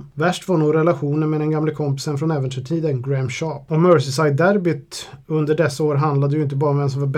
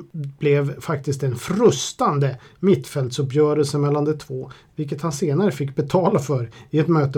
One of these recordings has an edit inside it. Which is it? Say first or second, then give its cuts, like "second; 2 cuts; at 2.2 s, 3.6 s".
second; 1 cut; at 4.7 s